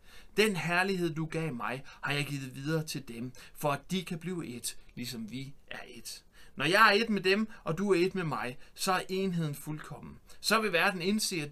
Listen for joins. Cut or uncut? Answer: uncut